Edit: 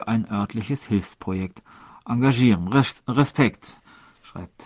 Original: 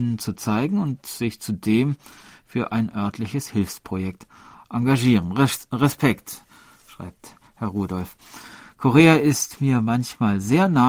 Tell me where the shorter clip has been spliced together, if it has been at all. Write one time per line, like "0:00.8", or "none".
none